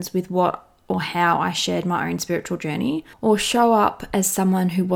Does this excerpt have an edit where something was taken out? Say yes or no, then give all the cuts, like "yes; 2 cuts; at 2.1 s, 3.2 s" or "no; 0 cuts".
yes; 1 cut; at 3.1 s